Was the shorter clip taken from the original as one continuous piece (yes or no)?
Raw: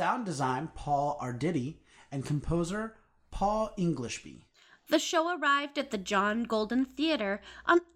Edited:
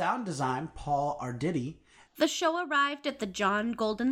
no